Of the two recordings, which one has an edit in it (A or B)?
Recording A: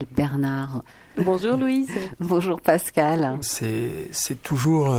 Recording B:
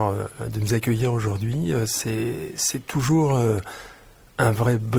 A